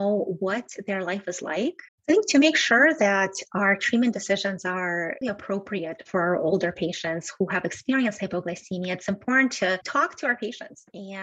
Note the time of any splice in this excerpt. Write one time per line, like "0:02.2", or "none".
0:01.9
0:05.2